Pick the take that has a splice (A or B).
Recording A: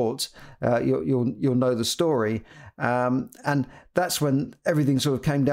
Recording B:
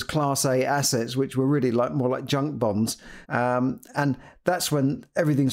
B